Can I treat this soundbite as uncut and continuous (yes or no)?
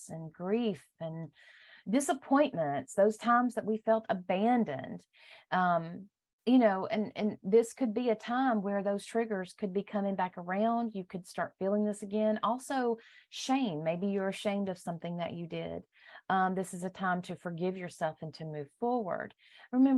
yes